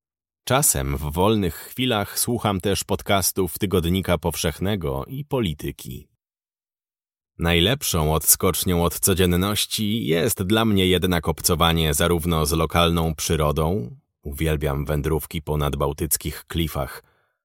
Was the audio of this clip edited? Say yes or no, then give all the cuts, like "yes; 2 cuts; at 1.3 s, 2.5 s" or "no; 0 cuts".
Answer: no; 0 cuts